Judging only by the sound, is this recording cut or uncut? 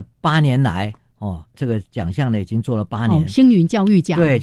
uncut